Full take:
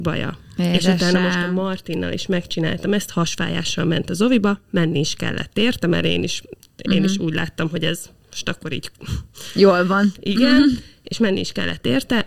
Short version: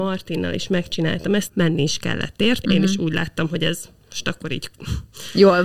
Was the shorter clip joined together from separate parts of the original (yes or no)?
yes